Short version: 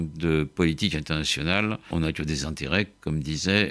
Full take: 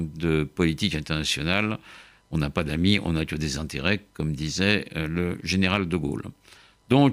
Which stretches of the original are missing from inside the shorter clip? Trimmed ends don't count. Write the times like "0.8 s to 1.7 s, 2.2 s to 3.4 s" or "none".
1.9 s to 3.0 s